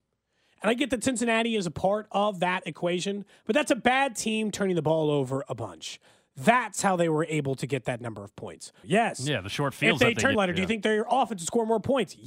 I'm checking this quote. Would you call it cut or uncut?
cut